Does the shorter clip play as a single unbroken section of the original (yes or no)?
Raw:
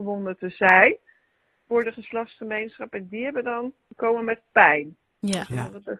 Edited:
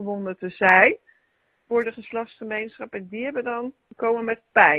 yes